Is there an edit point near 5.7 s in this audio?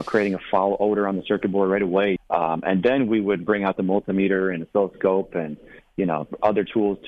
no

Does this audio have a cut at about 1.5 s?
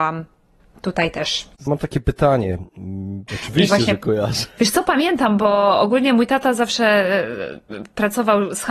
yes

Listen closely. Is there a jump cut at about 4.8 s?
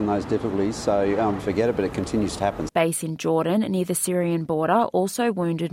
no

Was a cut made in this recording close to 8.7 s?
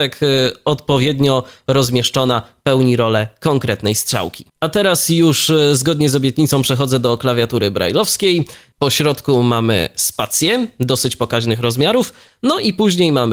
yes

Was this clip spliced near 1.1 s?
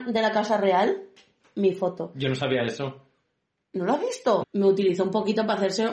no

